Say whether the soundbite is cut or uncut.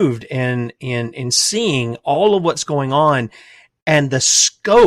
uncut